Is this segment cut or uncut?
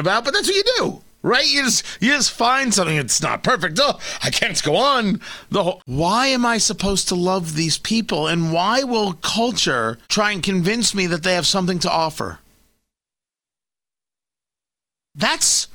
cut